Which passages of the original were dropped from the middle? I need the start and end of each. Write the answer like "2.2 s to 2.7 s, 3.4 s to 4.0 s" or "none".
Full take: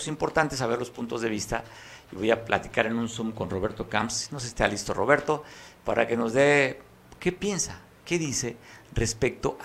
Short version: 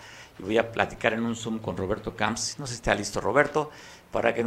none